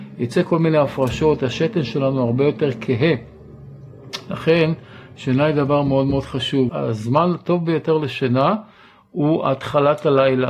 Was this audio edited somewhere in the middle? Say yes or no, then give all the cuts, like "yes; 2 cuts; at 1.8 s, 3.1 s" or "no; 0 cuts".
yes; 1 cut; at 6.7 s